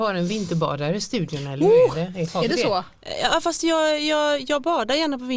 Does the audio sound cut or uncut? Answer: uncut